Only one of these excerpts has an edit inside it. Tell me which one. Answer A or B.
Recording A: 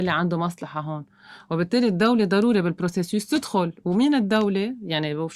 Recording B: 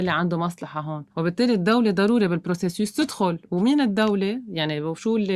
B